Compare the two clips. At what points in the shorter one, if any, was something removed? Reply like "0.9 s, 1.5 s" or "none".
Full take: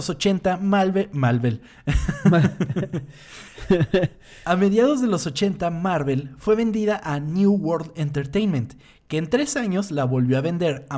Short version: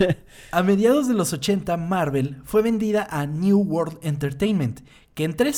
none